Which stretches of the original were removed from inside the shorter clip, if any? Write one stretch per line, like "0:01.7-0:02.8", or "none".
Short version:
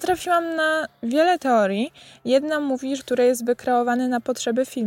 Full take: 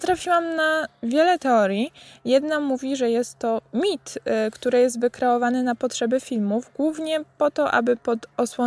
0:03.0-0:04.5